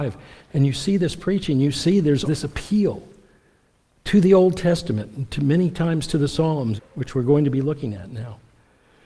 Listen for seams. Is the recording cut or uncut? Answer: cut